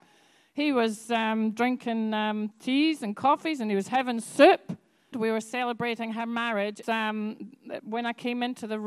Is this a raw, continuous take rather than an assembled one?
no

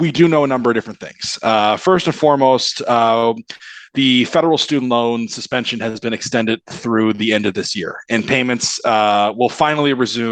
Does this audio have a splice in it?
no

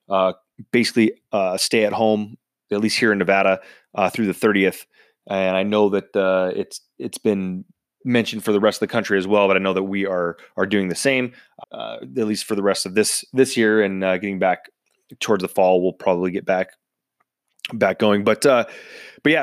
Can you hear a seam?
yes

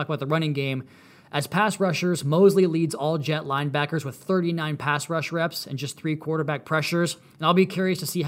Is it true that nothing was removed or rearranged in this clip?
yes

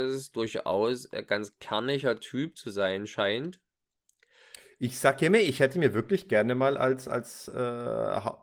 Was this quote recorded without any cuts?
yes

